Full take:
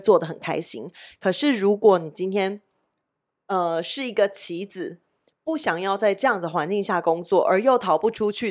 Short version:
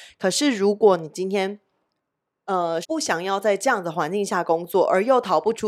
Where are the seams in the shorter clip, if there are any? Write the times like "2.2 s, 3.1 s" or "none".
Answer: 2.8 s